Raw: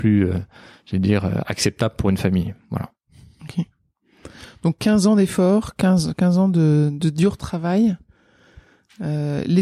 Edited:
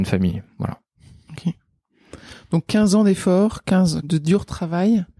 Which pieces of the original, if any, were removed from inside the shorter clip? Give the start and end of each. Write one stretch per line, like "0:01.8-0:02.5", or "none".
0:06.1-0:06.9

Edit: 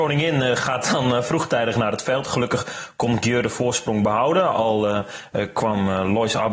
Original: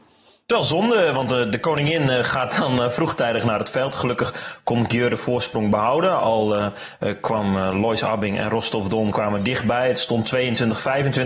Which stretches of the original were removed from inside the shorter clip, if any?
none

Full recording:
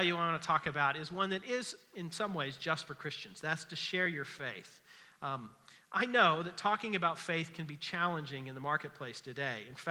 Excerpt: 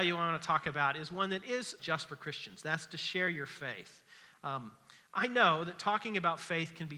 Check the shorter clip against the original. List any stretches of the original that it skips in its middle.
0:01.8-0:02.6

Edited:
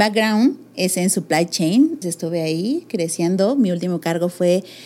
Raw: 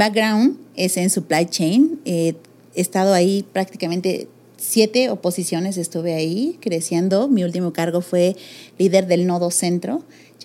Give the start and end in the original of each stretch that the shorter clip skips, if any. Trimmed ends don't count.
0:02.0-0:05.7

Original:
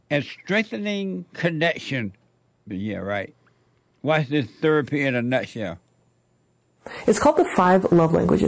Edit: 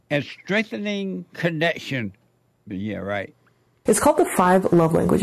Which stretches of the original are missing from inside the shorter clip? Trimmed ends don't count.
0:03.9-0:07.0

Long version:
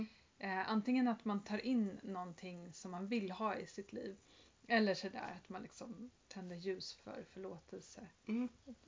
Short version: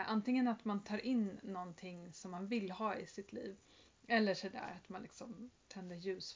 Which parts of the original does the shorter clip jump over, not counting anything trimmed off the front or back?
none

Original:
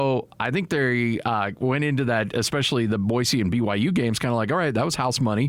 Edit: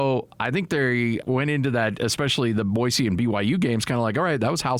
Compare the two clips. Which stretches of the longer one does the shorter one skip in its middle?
0:01.2-0:01.6

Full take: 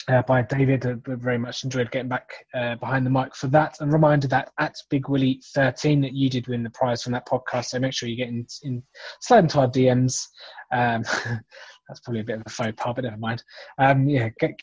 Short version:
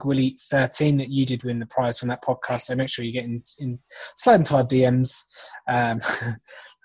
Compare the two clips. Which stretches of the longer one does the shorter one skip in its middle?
none

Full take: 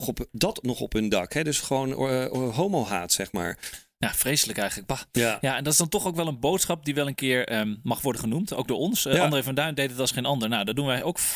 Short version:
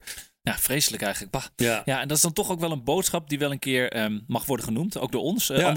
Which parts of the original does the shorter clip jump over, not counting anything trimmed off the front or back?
none

